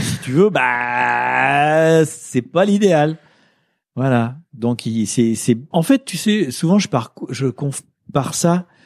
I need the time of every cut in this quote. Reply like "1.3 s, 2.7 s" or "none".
5.7 s